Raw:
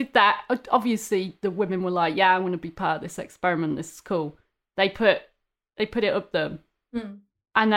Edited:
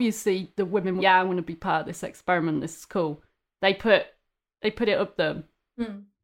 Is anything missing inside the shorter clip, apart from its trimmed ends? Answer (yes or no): yes